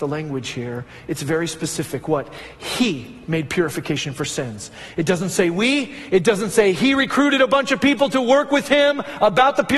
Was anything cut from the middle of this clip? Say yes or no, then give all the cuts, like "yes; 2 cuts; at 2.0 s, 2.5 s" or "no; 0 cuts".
no; 0 cuts